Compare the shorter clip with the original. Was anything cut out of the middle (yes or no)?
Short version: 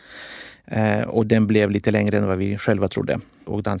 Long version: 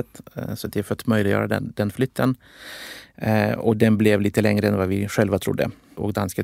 no